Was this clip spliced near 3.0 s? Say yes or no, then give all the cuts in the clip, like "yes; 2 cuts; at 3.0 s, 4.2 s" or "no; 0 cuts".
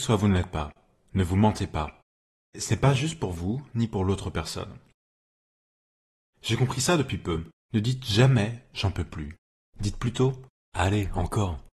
no; 2 cuts; at 6.3 s, 7.5 s